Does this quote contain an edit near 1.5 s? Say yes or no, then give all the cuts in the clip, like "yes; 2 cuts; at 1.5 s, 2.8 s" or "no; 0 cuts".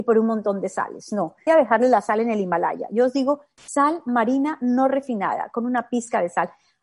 yes; 1 cut; at 1.5 s